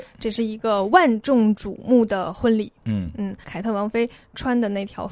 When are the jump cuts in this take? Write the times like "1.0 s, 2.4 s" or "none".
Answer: 3.4 s